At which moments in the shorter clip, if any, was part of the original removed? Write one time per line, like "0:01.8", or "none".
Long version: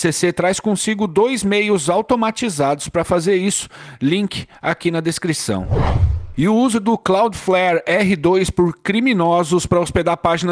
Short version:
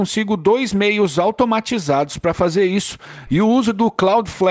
0:03.3